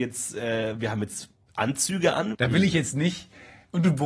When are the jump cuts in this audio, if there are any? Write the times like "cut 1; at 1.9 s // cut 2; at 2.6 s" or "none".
cut 1; at 2.3 s